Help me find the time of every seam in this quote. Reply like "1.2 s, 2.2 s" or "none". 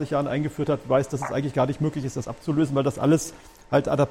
none